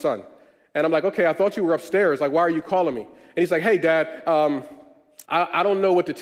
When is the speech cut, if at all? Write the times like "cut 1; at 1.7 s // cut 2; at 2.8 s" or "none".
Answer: cut 1; at 5.2 s